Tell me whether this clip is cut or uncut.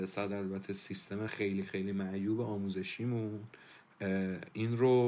uncut